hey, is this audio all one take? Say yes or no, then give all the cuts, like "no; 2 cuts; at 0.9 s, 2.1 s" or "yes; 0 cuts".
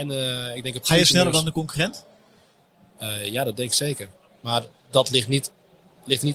yes; 0 cuts